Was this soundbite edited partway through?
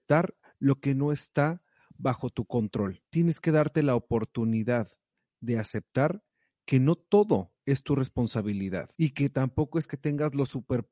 yes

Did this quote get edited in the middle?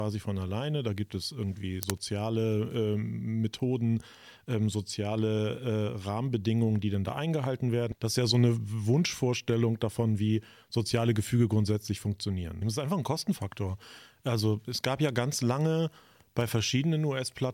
yes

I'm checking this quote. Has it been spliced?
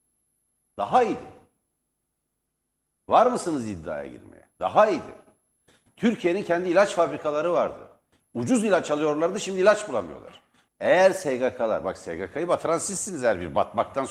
yes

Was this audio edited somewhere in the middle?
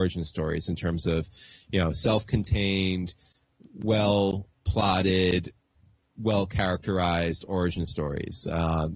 no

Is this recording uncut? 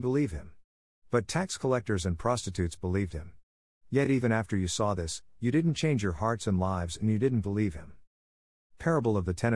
yes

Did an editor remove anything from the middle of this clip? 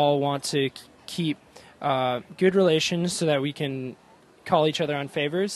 no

